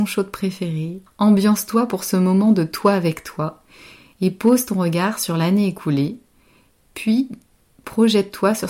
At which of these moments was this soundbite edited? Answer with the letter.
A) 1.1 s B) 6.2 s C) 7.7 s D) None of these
A